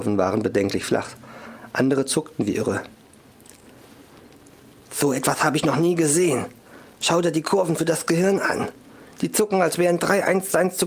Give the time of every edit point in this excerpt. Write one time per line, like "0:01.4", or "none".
none

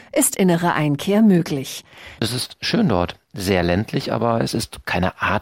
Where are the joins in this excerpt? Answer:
0:02.2

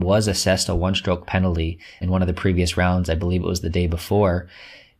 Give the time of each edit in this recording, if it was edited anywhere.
0:02.0

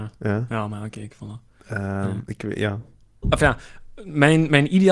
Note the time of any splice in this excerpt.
0:03.2

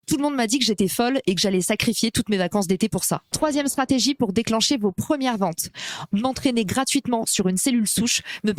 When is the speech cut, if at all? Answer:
0:03.3
0:06.1

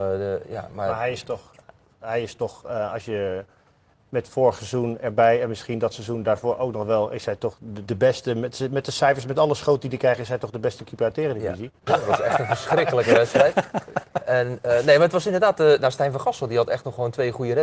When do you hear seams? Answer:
0:07.9
0:11.9

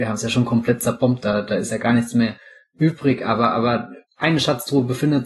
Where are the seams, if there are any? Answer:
0:04.0

